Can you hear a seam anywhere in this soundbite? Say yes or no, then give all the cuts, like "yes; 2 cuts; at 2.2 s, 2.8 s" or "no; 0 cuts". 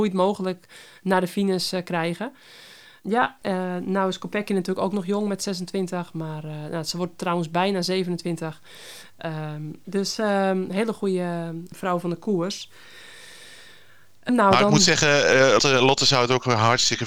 yes; 2 cuts; at 14.3 s, 15.6 s